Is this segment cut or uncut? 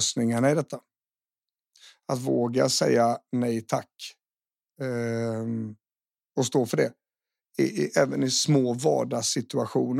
uncut